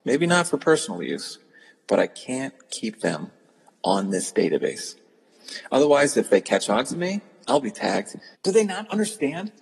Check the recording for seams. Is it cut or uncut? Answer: cut